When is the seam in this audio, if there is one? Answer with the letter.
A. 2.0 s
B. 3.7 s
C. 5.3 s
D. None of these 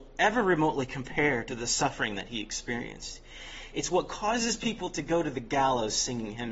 B